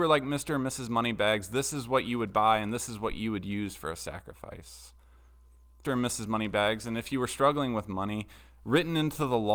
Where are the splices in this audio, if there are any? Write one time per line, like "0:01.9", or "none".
0:05.8